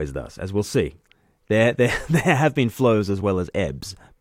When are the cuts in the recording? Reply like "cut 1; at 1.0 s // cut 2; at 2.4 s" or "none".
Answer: none